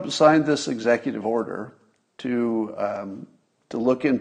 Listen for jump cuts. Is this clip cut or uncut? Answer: uncut